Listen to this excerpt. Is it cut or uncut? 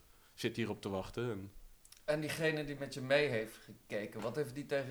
uncut